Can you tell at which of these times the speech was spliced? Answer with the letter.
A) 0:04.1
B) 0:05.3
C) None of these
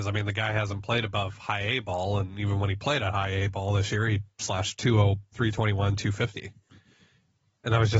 B